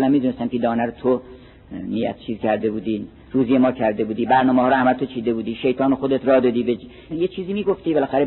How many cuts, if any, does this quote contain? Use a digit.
1